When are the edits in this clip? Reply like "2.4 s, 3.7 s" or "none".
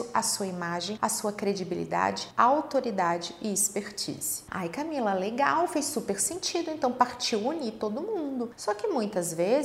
none